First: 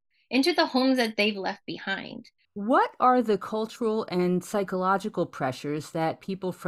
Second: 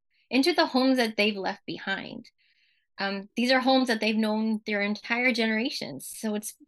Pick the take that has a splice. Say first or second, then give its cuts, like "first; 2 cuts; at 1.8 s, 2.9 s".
first; 1 cut; at 2.5 s